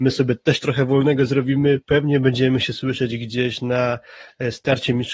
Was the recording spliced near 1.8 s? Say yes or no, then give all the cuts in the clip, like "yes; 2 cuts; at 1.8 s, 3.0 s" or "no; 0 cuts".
yes; 1 cut; at 1.8 s